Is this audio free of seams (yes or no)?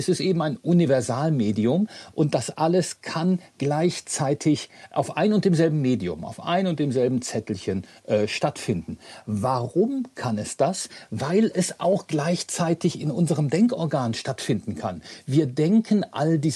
yes